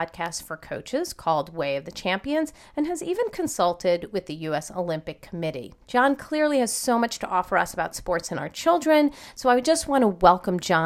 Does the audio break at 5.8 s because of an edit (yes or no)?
yes